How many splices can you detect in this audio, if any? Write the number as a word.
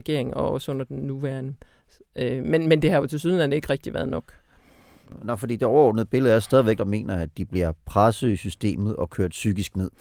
two